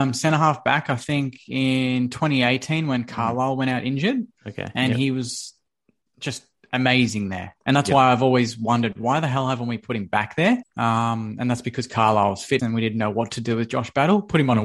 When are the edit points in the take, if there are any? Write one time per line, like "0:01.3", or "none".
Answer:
0:10.6
0:12.6